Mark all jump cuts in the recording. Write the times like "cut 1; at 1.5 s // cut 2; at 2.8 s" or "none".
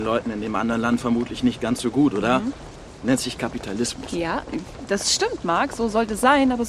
none